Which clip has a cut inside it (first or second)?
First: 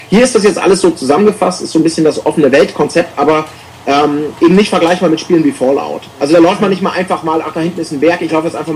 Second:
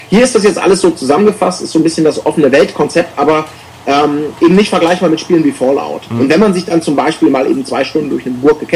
second